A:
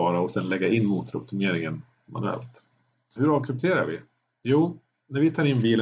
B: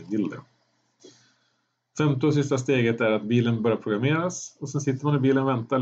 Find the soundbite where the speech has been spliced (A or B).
A